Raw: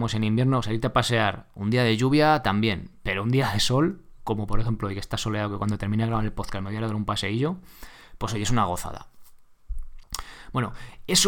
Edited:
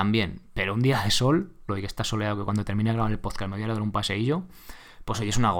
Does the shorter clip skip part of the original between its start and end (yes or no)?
yes